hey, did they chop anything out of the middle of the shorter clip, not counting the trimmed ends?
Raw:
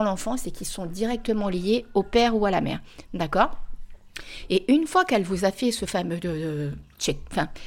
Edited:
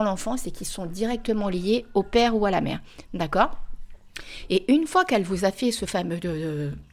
no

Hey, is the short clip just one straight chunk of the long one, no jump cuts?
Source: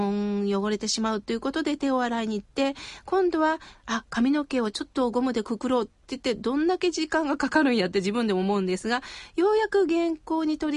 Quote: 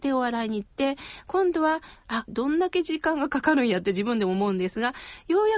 no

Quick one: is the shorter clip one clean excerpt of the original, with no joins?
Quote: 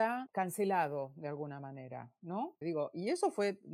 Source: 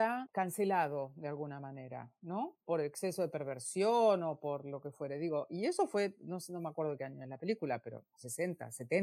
no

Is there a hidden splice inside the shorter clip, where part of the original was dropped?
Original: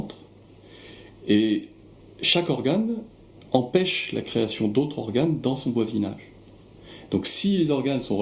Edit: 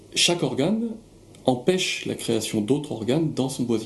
no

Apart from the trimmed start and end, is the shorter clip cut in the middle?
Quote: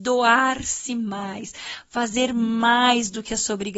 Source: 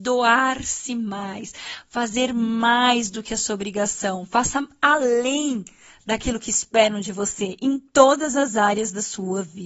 no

